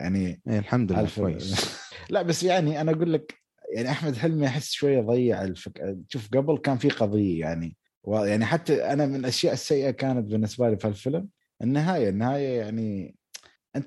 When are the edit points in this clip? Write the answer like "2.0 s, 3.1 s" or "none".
none